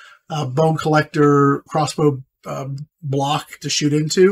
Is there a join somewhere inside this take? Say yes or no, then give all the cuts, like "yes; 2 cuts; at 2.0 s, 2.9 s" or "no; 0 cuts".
yes; 2 cuts; at 1.7 s, 2.9 s